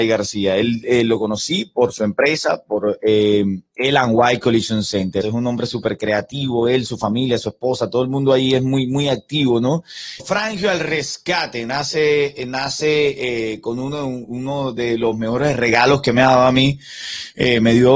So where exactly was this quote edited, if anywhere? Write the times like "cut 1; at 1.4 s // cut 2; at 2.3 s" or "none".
cut 1; at 5.2 s // cut 2; at 10.2 s